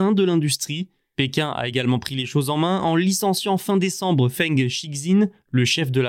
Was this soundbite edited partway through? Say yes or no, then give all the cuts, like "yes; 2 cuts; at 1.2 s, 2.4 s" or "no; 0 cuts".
no; 0 cuts